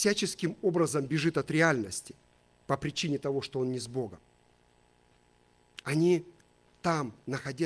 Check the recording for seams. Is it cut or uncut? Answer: uncut